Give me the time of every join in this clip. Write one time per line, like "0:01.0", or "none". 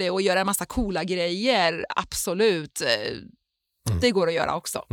none